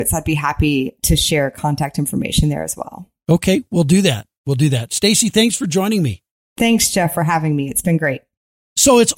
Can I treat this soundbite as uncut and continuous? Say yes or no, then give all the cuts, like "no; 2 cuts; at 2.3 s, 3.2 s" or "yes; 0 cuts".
yes; 0 cuts